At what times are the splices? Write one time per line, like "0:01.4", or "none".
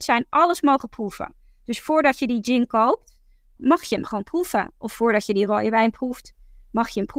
0:03.6